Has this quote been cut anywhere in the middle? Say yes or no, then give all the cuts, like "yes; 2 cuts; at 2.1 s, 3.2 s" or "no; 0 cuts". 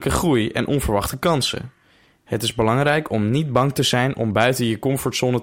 no; 0 cuts